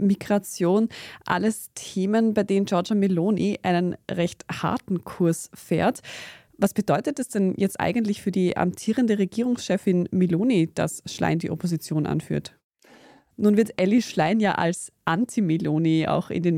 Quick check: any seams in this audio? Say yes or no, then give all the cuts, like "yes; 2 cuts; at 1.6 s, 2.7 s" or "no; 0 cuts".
yes; 2 cuts; at 6.5 s, 13.3 s